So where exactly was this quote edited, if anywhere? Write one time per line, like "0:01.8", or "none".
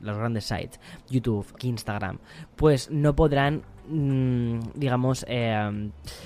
0:01.6